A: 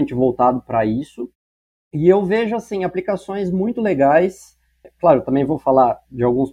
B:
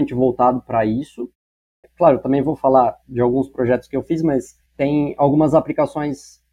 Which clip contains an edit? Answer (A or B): B